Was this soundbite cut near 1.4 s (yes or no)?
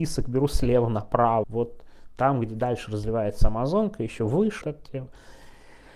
yes